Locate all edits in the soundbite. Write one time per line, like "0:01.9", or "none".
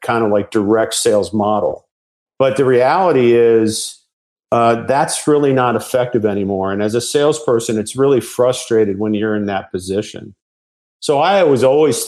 none